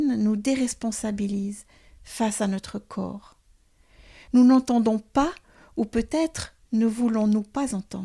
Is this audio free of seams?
yes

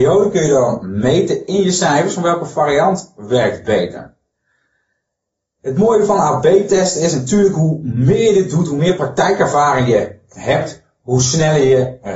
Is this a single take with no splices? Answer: yes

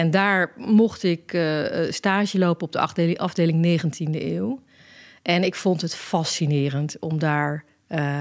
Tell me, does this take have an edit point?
no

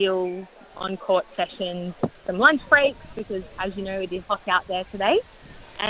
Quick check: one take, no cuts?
no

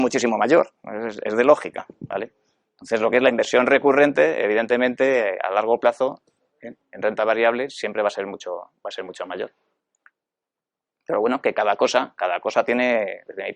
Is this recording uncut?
yes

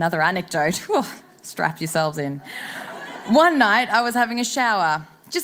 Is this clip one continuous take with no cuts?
yes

